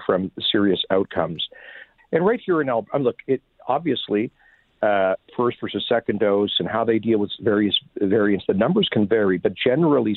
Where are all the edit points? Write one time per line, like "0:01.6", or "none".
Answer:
0:02.0